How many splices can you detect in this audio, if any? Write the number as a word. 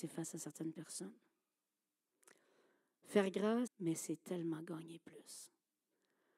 one